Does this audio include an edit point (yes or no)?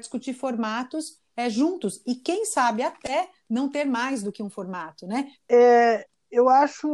yes